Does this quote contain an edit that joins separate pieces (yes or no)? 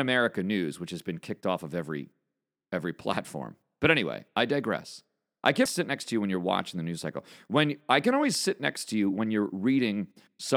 yes